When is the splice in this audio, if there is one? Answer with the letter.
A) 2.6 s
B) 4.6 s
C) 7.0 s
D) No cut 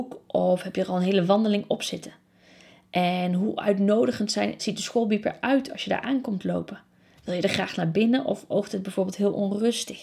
B